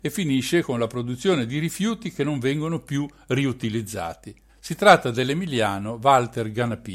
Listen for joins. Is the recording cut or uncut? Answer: cut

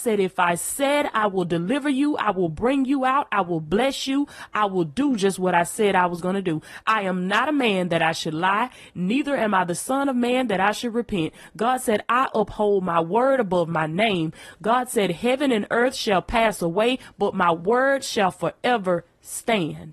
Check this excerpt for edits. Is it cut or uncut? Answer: uncut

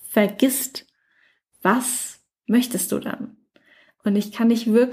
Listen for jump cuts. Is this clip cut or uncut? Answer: uncut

